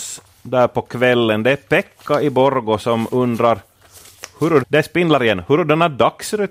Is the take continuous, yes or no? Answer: no